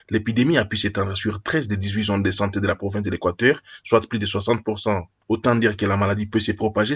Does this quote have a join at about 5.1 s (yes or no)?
no